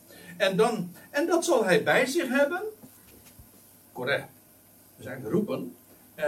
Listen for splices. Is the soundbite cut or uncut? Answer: cut